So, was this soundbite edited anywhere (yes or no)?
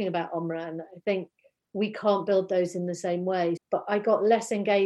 yes